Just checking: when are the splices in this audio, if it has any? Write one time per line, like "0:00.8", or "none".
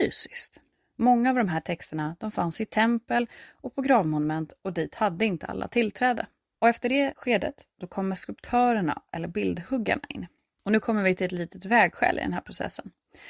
0:06.6